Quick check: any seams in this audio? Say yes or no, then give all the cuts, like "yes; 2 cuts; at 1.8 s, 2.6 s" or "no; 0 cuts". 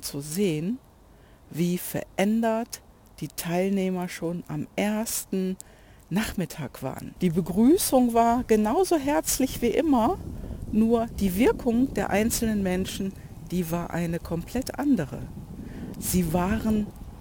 yes; 1 cut; at 7.2 s